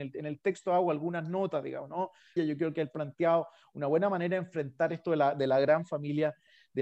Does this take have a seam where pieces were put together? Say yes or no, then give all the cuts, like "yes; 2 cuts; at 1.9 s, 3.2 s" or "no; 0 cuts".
yes; 1 cut; at 2.4 s